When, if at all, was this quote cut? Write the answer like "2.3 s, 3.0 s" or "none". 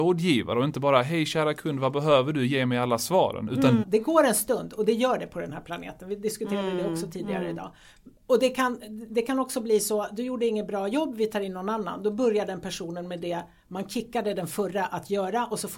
3.8 s